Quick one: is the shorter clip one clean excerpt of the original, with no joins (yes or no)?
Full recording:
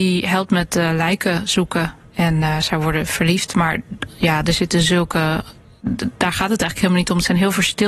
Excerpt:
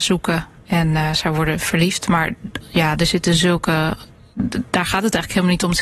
yes